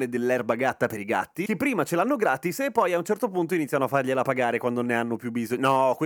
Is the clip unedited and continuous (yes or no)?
yes